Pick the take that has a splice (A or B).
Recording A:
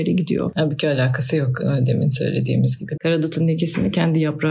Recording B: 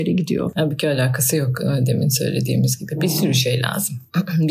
A